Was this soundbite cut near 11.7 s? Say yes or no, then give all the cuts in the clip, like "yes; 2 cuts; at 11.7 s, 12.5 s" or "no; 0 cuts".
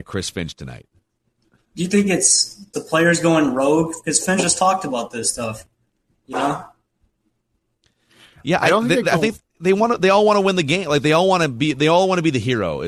no; 1 cut; at 2.7 s